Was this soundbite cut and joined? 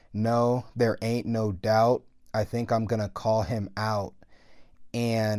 no; 0 cuts

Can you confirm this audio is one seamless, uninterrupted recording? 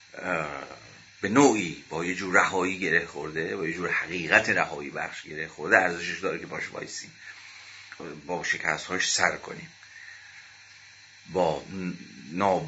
no; 1 cut; at 8.0 s

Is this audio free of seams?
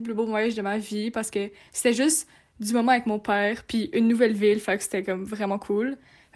yes; 0 cuts

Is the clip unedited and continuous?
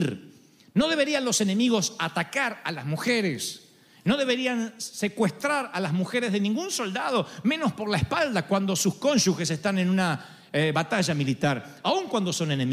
yes; 0 cuts

